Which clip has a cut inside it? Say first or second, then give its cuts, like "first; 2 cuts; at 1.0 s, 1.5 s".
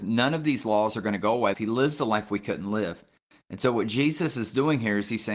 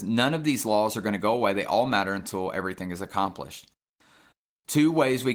first; 1 cut; at 1.5 s